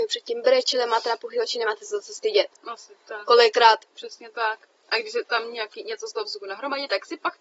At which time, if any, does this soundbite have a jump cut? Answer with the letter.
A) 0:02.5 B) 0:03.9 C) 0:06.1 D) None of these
B